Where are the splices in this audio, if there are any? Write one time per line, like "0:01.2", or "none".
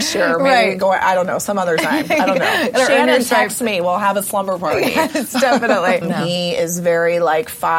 0:06.0